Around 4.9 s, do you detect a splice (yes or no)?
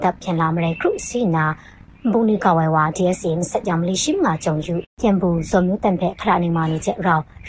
yes